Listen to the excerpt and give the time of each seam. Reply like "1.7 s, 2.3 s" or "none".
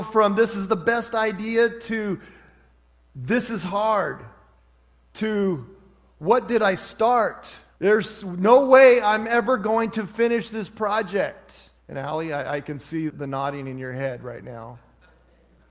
7.8 s, 11.8 s, 13.1 s